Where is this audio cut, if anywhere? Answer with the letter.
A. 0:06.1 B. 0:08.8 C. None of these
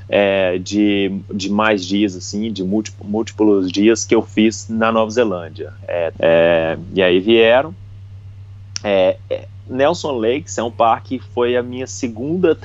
A